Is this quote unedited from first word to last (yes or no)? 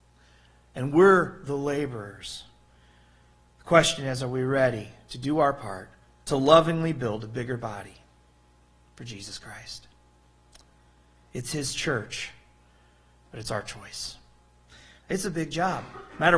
no